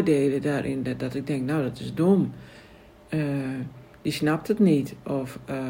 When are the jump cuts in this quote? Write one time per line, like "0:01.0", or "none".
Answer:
none

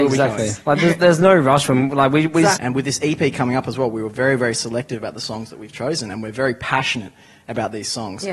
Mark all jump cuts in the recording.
0:02.6

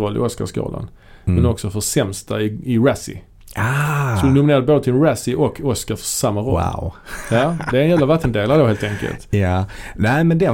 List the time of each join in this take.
none

